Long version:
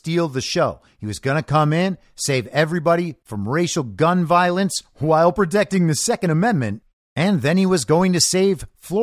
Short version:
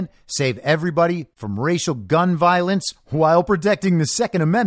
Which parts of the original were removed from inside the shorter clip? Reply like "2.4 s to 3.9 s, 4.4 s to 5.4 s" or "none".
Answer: none